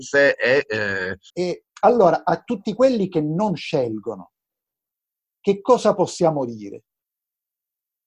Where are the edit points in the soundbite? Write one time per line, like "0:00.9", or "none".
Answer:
0:01.3